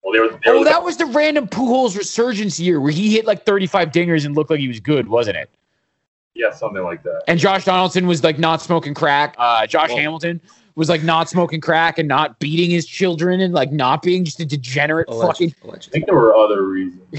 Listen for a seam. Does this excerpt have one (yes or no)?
yes